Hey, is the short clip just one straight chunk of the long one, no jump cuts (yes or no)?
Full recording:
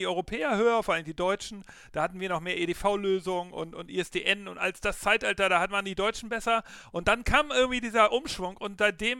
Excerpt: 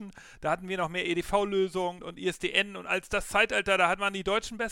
no